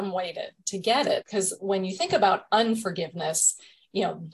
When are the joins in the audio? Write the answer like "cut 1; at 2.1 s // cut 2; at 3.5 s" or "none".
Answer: cut 1; at 1.2 s